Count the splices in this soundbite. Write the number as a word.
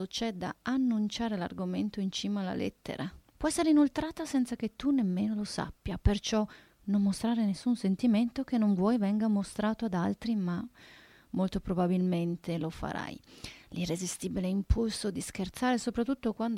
one